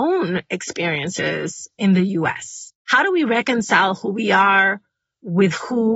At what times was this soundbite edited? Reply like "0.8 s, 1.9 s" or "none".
2.8 s